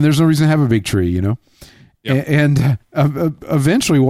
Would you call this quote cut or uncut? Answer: uncut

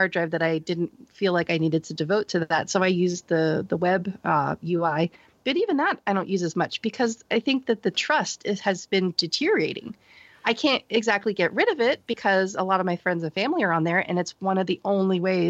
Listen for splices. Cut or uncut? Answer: uncut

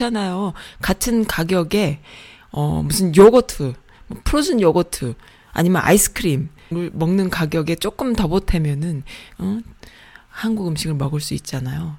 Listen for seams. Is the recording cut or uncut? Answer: cut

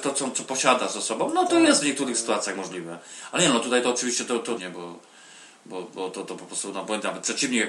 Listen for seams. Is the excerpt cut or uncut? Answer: cut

